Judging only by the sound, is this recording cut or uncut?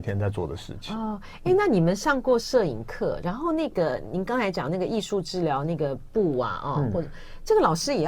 uncut